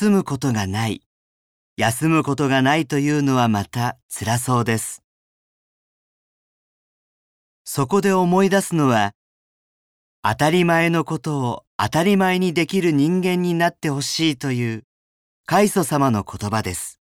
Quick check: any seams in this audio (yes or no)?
yes